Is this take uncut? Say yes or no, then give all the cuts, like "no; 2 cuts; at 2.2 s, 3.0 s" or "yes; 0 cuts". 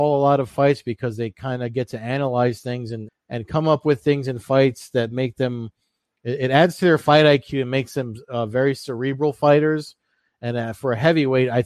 no; 1 cut; at 3.1 s